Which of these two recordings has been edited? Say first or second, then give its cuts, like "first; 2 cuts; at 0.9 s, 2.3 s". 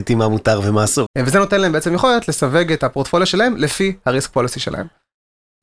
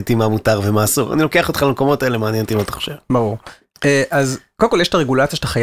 first; 1 cut; at 1.1 s